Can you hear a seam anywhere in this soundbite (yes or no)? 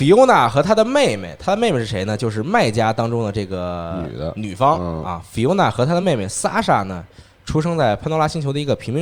no